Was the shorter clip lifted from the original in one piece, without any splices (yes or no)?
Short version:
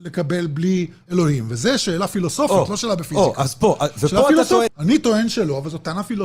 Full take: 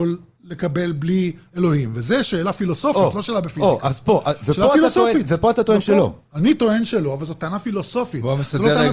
no